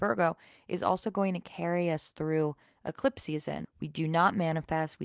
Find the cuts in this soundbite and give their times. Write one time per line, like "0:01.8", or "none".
0:03.6